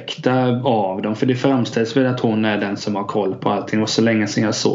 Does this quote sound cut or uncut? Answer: uncut